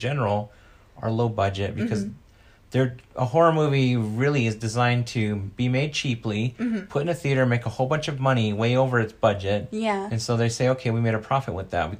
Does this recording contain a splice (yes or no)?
no